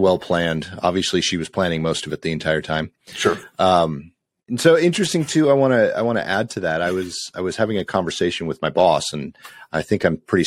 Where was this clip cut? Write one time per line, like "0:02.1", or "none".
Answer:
none